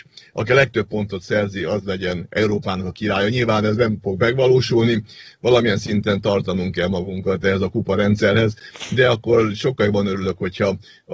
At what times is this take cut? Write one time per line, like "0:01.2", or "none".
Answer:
none